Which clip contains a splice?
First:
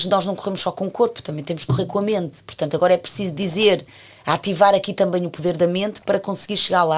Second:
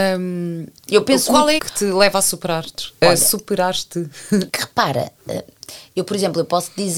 second; 2 cuts; at 1.6 s, 4.5 s

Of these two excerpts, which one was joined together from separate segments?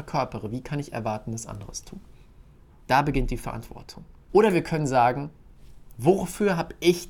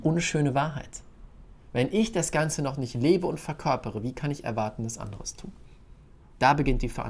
first; 1 cut; at 4.3 s

